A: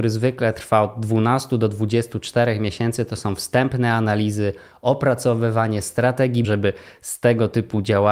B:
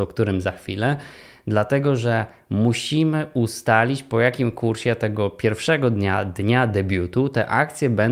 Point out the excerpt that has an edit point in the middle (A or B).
A